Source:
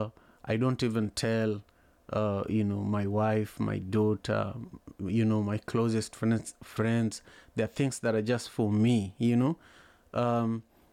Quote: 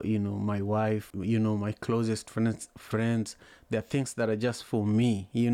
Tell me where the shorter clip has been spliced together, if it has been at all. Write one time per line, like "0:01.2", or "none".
0:01.1